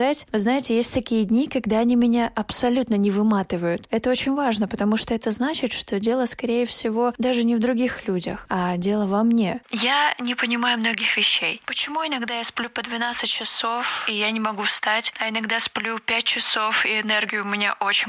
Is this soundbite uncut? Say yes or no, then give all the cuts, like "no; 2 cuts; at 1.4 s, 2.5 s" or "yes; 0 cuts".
yes; 0 cuts